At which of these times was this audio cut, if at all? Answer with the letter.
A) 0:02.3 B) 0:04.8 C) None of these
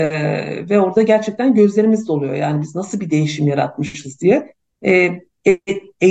C